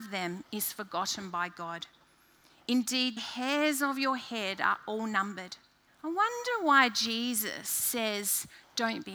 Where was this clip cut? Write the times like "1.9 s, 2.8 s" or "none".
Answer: 3.2 s, 5.9 s